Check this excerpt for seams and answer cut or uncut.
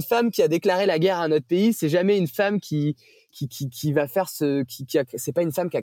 uncut